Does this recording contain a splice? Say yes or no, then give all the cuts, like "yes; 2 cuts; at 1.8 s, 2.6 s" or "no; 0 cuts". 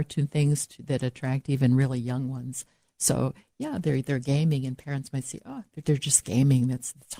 yes; 1 cut; at 5.8 s